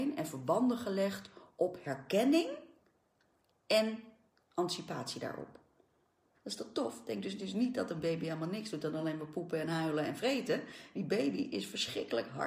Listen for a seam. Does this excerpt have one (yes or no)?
yes